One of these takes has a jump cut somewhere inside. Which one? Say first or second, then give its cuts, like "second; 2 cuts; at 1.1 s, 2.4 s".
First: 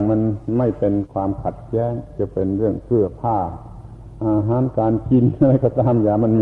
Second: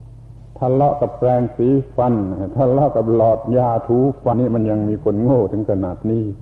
second; 1 cut; at 4.3 s